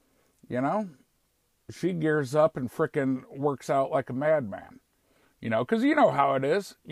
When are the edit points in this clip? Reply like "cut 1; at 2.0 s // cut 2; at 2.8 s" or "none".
cut 1; at 5.2 s